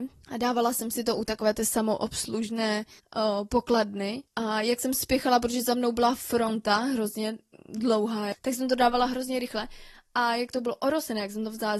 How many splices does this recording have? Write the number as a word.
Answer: one